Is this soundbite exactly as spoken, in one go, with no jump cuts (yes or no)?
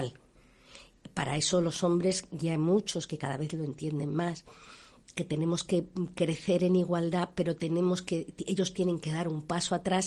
yes